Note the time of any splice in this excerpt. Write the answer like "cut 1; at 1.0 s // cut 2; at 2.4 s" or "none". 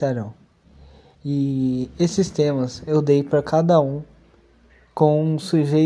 none